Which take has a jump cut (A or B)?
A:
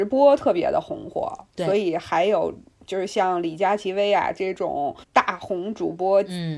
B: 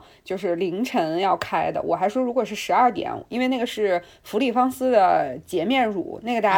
A